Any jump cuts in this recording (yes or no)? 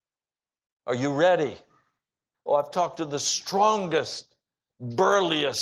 yes